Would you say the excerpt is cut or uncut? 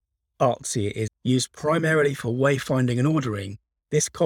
cut